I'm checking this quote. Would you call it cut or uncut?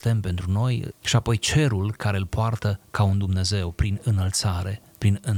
cut